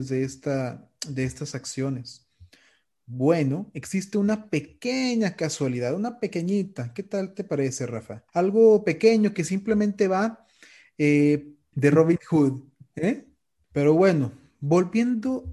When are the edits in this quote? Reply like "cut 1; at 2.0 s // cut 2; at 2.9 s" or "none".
cut 1; at 8.3 s // cut 2; at 11.7 s // cut 3; at 13.6 s